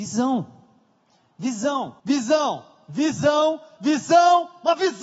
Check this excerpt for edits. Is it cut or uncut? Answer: cut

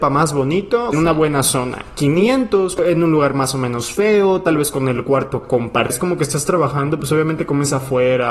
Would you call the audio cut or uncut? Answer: cut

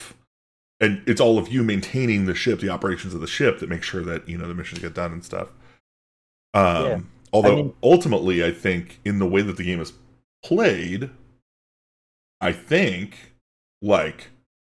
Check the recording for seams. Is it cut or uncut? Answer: uncut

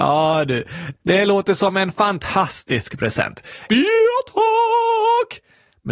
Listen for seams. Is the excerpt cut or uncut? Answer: cut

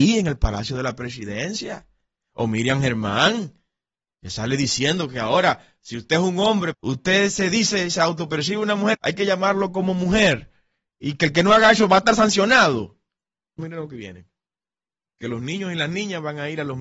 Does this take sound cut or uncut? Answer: cut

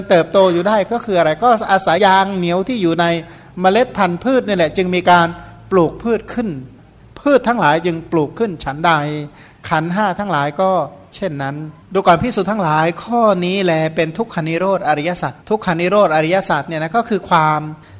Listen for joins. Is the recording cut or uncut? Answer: cut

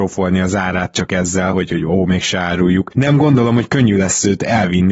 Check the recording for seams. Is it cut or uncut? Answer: uncut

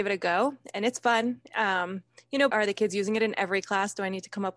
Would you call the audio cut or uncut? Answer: cut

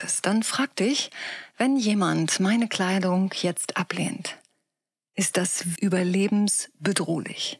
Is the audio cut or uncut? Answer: cut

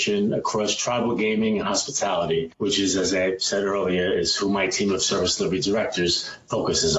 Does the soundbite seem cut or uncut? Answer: uncut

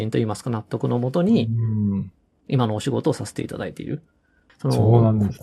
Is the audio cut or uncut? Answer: cut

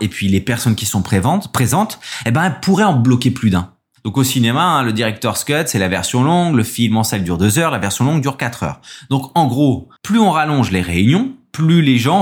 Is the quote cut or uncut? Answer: cut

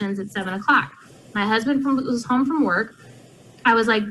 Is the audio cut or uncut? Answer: uncut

